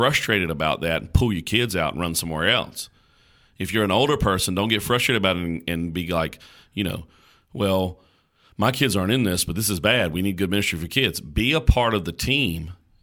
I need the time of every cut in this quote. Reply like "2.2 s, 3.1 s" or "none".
none